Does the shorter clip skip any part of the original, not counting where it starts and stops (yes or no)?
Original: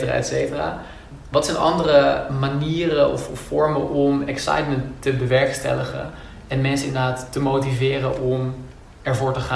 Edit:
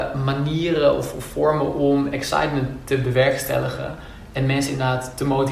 no